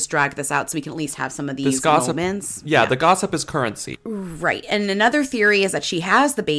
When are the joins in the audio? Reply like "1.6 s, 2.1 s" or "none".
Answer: 3.9 s